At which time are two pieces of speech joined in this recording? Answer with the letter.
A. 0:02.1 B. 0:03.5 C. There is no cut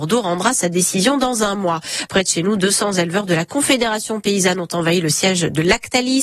A